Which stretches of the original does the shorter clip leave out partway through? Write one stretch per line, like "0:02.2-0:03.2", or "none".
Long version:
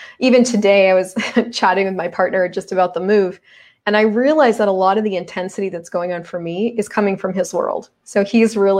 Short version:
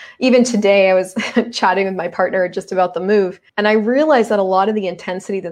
0:03.5-0:03.8

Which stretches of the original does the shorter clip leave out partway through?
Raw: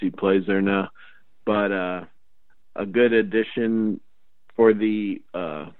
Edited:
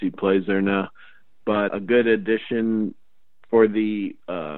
0:01.7-0:02.7

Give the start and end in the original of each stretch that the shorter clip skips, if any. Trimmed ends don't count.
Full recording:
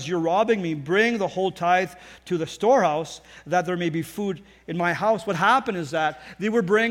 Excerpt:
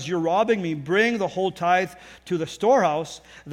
none

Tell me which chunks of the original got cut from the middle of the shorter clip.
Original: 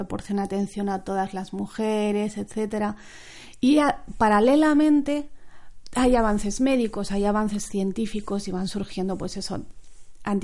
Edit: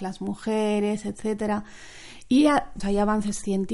0:04.1-0:07.1

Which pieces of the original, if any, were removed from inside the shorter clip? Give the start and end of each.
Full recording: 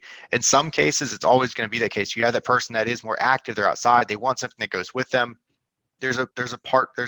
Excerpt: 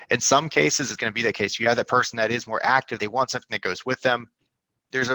0:01.2-0:01.5
0:03.5-0:04.1

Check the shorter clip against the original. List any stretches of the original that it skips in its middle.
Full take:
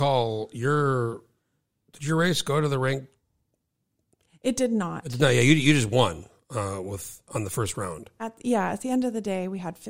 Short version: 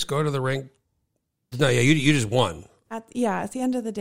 0:03.9-0:05.1
0:06.4-0:08.1

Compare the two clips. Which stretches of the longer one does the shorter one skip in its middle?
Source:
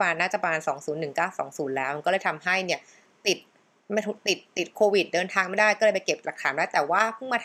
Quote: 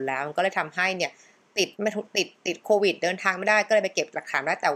0:03.4-0:03.8

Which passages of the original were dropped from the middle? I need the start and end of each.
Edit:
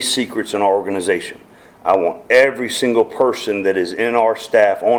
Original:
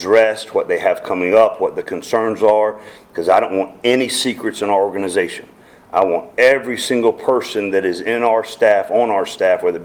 none

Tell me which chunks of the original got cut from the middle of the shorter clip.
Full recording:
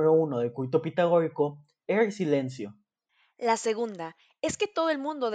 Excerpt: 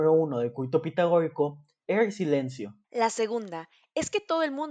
0:02.8-0:03.3

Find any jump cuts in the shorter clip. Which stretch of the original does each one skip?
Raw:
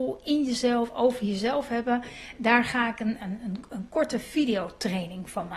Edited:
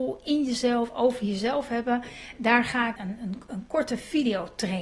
0:03.0-0:03.2

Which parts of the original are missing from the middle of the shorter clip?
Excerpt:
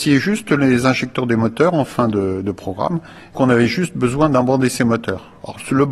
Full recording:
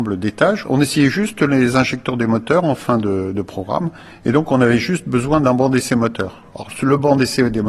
0:04.2-0:04.5

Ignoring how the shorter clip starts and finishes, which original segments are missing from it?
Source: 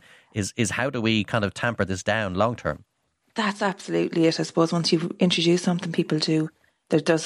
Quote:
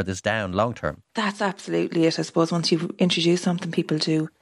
0:02.9-0:03.3

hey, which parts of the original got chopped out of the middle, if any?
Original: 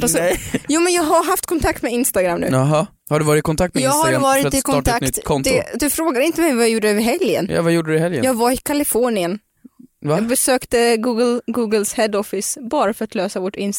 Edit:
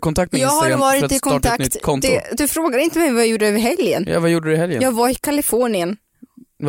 none

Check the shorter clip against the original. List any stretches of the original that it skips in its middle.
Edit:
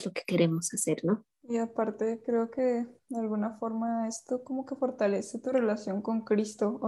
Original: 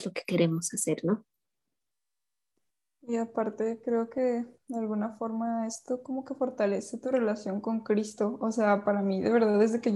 0:01.3-0:02.9

